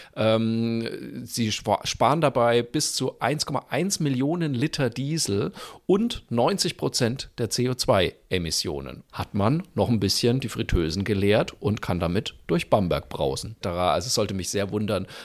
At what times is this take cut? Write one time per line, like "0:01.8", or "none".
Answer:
0:09.1
0:13.6